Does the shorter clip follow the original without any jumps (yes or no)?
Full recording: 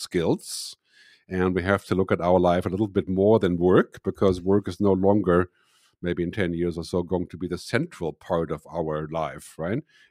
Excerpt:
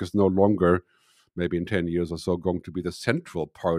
yes